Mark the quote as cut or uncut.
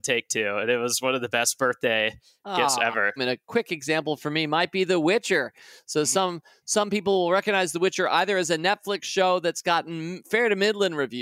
cut